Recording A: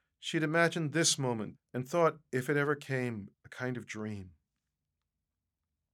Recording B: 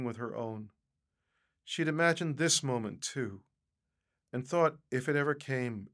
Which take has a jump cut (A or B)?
A